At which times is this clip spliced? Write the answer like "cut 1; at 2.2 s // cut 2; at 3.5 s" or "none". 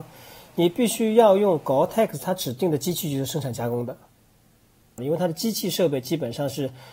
cut 1; at 5.0 s